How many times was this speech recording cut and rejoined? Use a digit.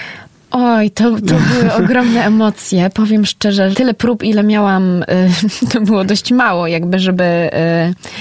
1